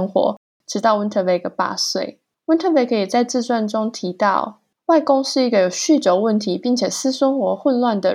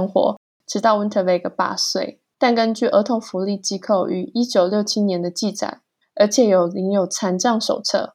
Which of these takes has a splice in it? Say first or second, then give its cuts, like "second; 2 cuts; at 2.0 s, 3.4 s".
second; 2 cuts; at 2.4 s, 6.0 s